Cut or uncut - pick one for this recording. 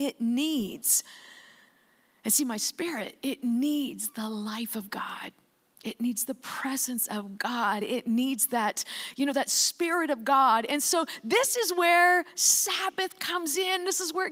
uncut